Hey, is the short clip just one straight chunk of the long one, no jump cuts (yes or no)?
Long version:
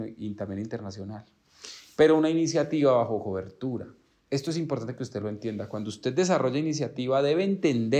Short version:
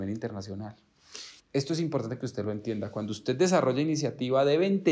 no